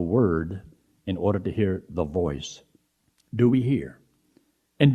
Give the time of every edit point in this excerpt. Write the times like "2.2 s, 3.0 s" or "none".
3.2 s